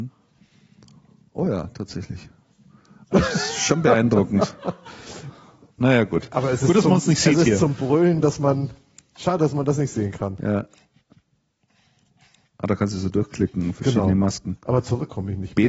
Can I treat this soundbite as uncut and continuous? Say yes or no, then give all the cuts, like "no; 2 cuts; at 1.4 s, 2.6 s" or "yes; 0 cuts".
yes; 0 cuts